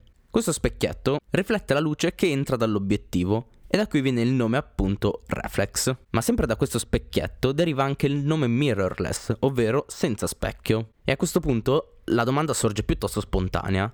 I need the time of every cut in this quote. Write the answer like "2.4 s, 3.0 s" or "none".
1.2 s